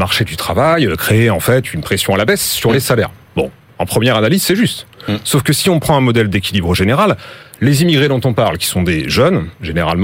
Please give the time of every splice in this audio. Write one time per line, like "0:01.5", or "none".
none